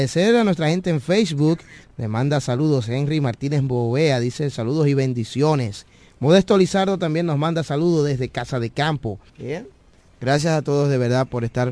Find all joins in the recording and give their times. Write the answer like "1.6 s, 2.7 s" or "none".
1.8 s, 9.3 s